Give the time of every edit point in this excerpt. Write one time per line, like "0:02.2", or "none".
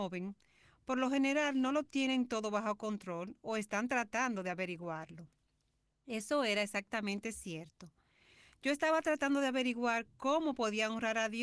none